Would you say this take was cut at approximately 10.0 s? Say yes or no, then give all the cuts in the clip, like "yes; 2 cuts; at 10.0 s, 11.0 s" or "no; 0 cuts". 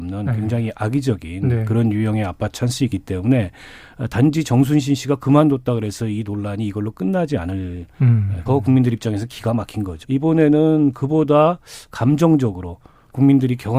yes; 2 cuts; at 8.5 s, 10.0 s